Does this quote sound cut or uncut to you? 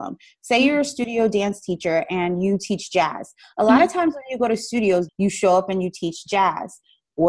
cut